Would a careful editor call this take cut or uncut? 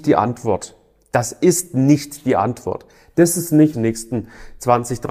cut